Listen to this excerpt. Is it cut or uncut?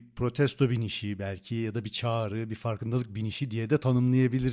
uncut